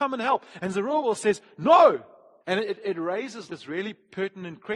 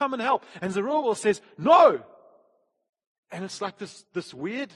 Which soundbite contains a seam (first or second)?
first